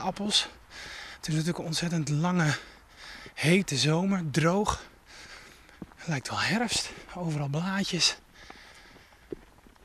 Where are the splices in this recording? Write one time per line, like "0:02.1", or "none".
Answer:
none